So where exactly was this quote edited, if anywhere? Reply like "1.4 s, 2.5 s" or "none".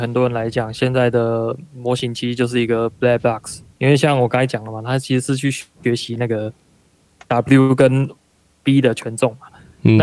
none